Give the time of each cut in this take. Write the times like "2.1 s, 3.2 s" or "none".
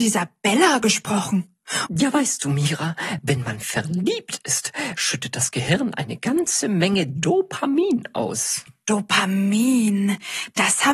1.9 s